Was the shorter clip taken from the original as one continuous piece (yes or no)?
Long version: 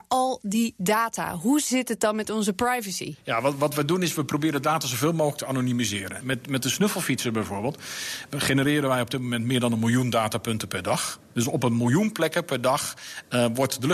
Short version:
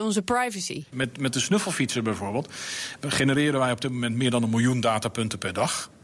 no